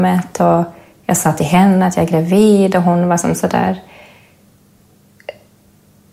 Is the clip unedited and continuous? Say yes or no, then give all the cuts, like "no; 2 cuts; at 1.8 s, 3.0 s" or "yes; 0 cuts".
yes; 0 cuts